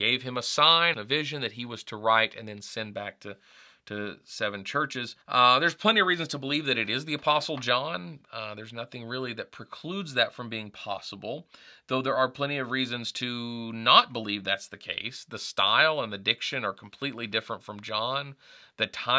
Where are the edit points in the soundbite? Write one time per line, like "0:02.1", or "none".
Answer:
0:00.9
0:05.2